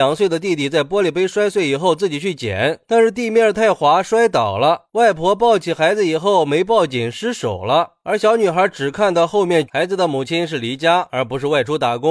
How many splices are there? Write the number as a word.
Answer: one